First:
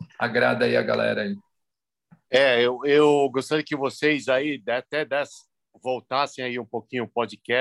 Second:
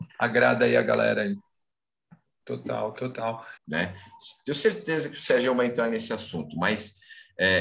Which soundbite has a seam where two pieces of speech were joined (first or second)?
second